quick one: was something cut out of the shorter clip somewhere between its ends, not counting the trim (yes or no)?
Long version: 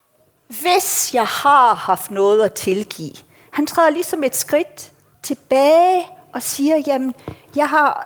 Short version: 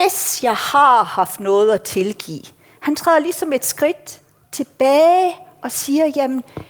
no